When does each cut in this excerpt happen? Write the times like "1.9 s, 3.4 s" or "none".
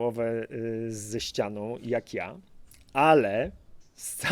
none

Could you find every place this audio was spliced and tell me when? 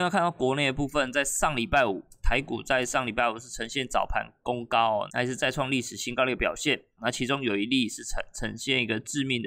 5.1 s, 7.0 s

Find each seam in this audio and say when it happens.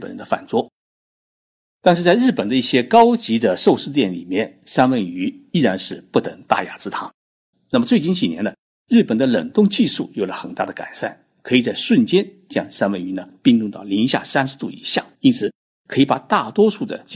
7.5 s, 15.1 s

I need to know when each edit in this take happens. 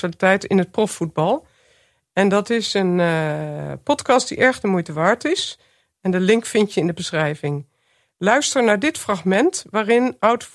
none

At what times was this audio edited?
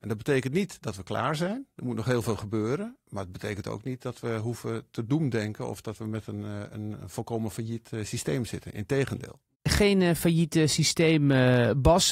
none

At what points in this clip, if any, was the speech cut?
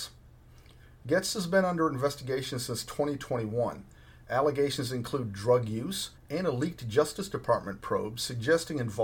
6.2 s

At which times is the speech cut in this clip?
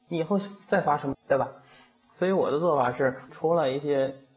1.1 s, 3.3 s

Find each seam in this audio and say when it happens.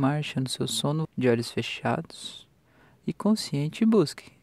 1.0 s

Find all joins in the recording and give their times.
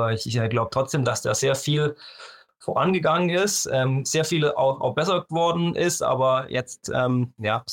none

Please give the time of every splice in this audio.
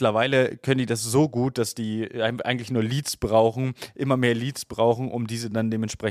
none

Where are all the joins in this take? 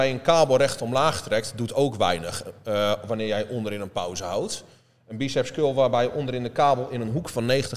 none

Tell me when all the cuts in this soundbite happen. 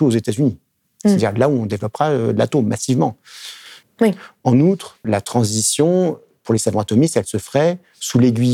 3.8 s, 5.0 s

